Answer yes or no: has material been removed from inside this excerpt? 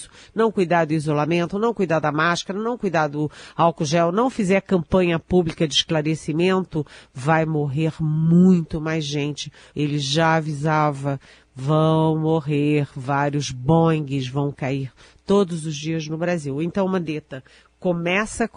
yes